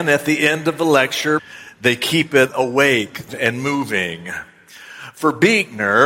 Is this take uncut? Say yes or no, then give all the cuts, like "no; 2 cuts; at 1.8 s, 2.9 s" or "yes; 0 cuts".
no; 2 cuts; at 1.4 s, 3.3 s